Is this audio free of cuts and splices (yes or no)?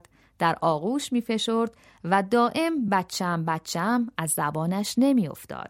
yes